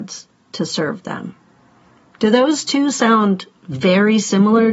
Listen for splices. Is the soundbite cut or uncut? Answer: uncut